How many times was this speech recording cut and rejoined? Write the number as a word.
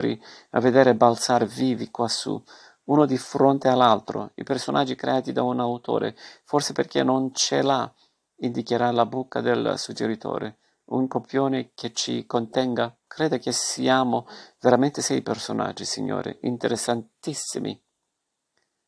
one